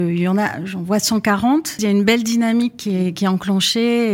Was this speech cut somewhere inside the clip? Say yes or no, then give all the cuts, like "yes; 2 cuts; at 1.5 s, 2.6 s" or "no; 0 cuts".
yes; 1 cut; at 1.8 s